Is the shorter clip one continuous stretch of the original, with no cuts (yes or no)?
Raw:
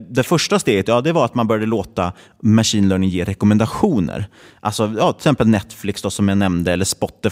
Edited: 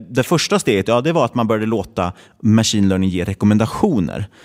yes